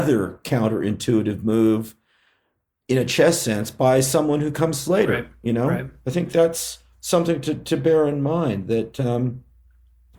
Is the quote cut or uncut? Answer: uncut